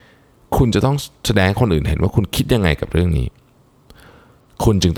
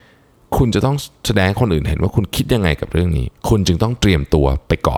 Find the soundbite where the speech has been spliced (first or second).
second